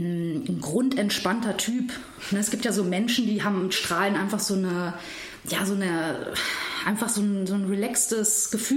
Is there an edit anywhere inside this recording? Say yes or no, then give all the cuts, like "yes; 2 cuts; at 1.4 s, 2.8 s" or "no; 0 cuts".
no; 0 cuts